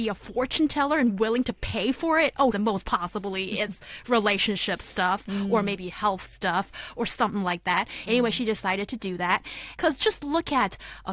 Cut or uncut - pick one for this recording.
cut